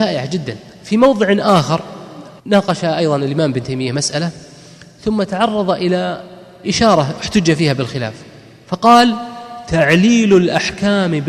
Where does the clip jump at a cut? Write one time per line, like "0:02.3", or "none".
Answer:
0:02.4